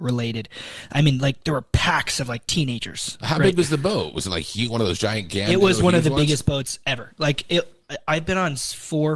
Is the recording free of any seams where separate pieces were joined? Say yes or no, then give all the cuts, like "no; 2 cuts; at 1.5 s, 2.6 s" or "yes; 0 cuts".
yes; 0 cuts